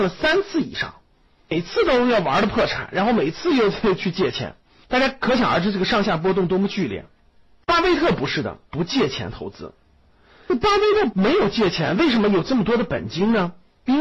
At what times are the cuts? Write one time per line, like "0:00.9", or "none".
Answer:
0:08.7